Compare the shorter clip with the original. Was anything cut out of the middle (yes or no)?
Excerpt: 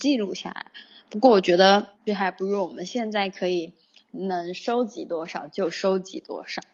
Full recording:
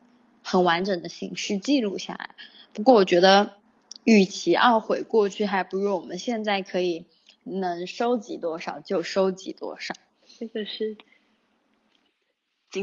yes